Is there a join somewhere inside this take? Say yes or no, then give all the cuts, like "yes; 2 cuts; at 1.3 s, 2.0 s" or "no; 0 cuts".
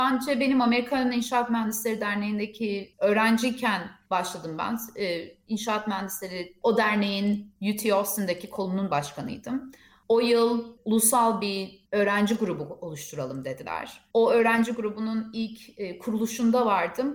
no; 0 cuts